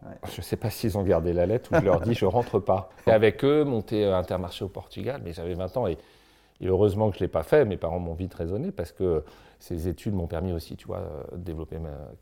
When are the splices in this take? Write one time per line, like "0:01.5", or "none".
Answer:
0:03.1